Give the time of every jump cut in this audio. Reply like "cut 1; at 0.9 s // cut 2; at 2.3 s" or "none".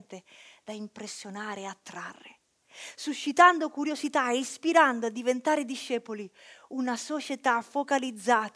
none